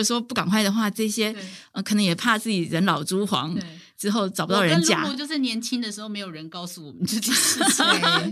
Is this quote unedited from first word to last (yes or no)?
yes